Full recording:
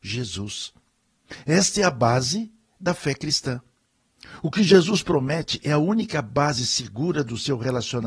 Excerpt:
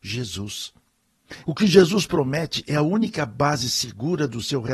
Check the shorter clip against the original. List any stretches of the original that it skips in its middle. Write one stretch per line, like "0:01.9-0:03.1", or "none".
0:01.4-0:04.4